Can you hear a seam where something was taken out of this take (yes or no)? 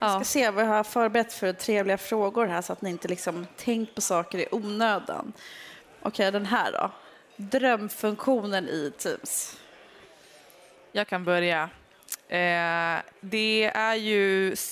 no